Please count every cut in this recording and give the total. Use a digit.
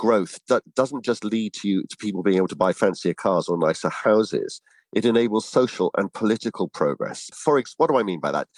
1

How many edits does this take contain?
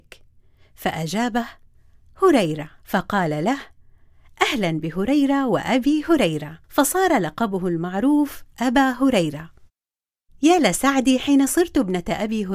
2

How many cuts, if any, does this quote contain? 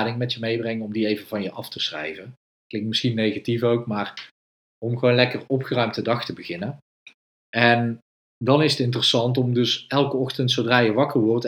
0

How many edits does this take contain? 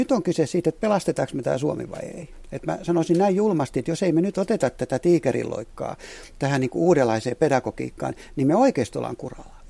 0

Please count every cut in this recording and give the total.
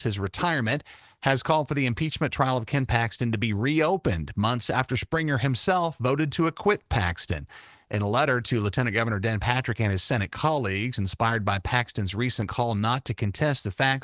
0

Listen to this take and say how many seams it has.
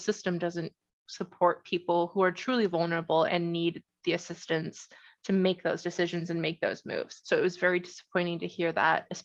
2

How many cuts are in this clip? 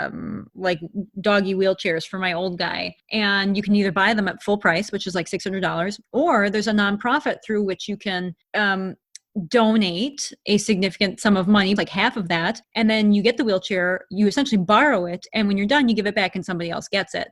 1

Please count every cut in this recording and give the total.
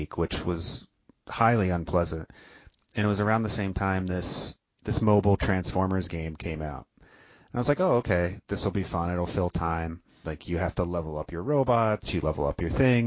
2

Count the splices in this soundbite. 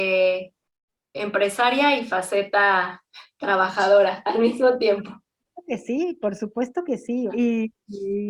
2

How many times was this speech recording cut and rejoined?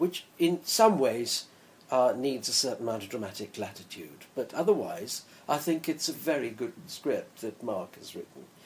1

